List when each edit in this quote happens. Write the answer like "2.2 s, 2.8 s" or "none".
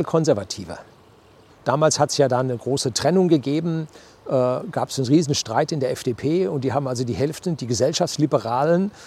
1.5 s